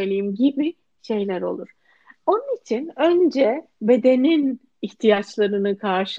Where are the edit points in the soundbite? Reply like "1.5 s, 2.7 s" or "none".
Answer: none